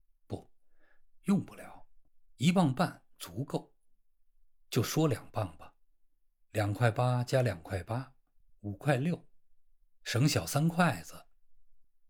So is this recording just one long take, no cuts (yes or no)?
yes